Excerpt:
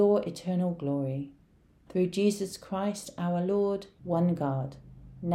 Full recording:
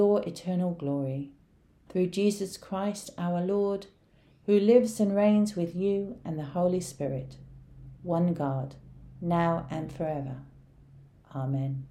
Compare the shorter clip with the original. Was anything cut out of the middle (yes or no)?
yes